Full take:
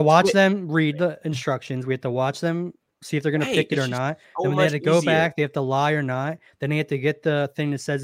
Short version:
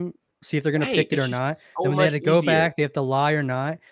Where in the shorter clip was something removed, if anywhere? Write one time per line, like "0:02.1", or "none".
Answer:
none